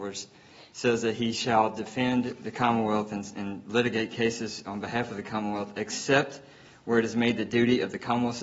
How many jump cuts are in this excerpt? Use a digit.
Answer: 0